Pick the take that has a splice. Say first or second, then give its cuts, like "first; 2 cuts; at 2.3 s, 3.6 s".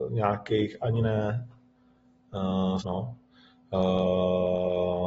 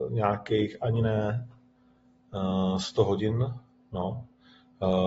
first; 1 cut; at 2.8 s